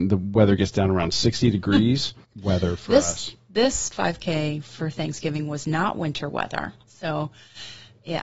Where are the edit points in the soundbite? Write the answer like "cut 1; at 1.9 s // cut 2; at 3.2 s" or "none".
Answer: cut 1; at 2.2 s // cut 2; at 6.8 s